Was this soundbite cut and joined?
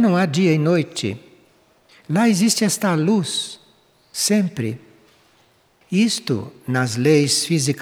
no; 0 cuts

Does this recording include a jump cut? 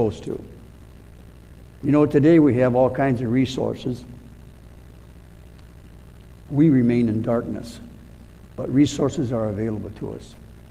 yes; 1 cut; at 6.5 s

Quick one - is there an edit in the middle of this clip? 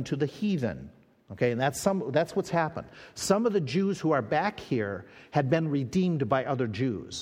no; 0 cuts

